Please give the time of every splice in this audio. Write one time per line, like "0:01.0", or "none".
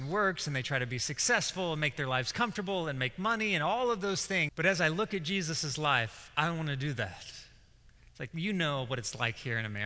0:04.5
0:08.0